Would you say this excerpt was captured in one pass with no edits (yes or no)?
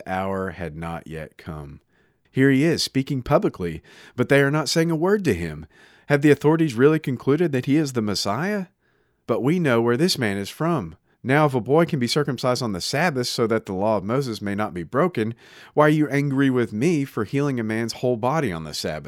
no